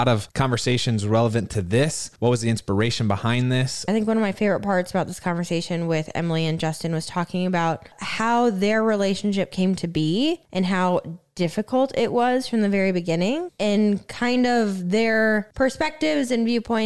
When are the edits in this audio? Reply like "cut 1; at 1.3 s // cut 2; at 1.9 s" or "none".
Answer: cut 1; at 3.9 s // cut 2; at 13.5 s